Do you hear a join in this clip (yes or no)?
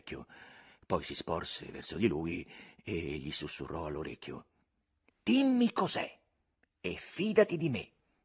yes